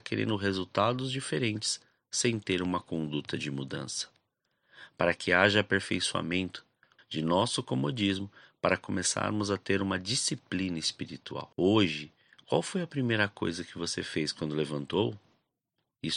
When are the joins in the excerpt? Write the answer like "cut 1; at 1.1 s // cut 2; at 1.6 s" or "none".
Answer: cut 1; at 7.0 s // cut 2; at 11.5 s